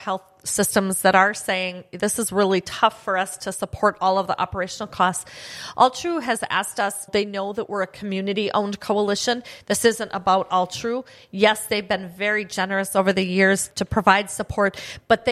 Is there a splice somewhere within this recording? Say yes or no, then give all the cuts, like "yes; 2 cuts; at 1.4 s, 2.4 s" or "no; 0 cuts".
yes; 2 cuts; at 7.1 s, 13.7 s